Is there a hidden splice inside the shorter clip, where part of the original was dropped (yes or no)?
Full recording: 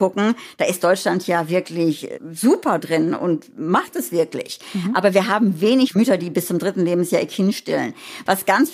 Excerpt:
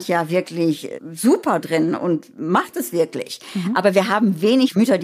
no